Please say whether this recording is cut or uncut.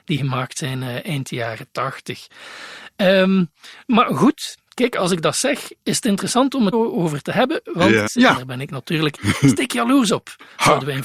cut